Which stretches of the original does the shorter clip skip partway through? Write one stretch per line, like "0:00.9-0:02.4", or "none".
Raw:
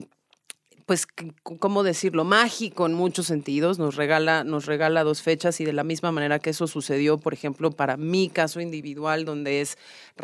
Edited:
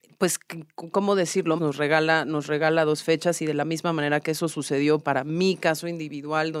0:02.3-0:03.8
0:07.2-0:07.7